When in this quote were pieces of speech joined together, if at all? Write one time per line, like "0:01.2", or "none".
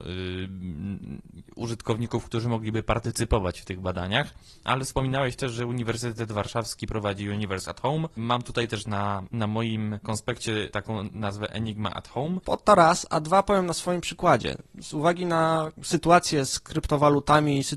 0:12.4